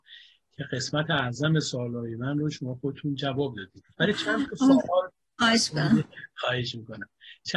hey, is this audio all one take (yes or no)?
no